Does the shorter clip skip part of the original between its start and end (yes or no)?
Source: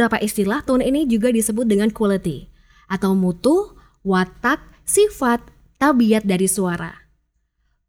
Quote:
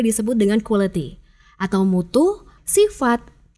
yes